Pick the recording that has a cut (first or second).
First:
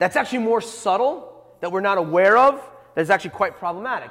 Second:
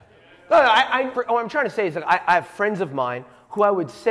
second